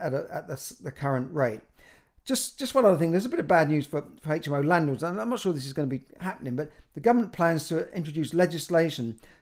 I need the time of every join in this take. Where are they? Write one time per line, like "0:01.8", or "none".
none